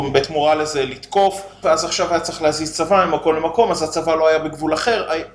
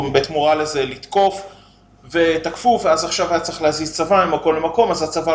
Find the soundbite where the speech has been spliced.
first; 1 cut; at 1.6 s

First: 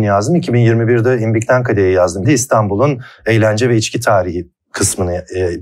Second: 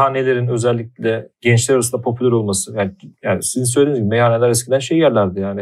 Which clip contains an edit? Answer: first; 1 cut; at 2.2 s

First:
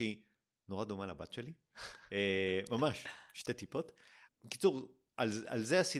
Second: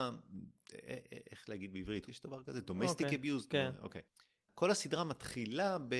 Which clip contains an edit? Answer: second; 1 cut; at 2.1 s

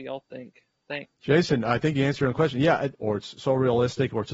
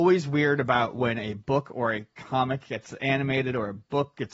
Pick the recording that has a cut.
first; 2 cuts; at 1.1 s, 2.9 s

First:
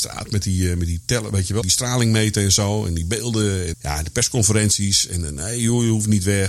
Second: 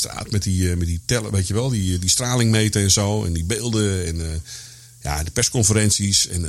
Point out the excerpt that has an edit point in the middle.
first; 2 cuts; at 1.6 s, 3.7 s

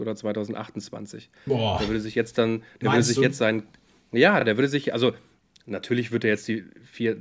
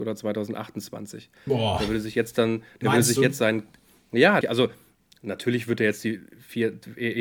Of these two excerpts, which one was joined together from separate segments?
second; 1 cut; at 4.4 s

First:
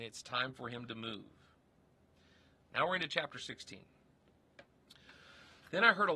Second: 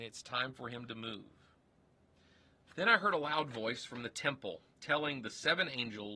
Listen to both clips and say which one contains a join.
second; 2 cuts; at 2.7 s, 4.7 s

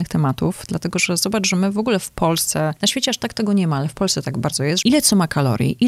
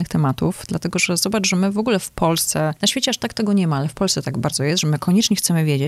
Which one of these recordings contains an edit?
first; 1 cut; at 4.8 s

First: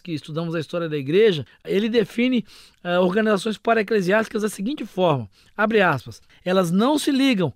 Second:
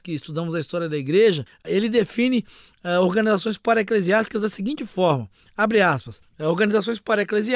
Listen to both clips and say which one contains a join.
first; 1 cut; at 6.3 s

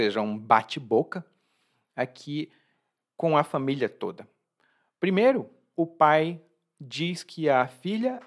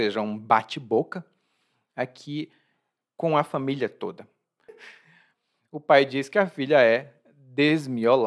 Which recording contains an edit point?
second; 1 cut; at 4.7 s

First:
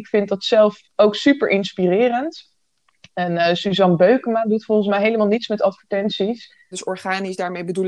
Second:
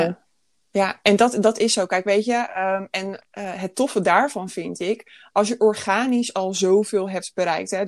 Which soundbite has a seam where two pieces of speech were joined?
first; 1 cut; at 6.7 s

